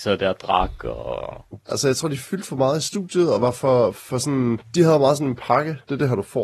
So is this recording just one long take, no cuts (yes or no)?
no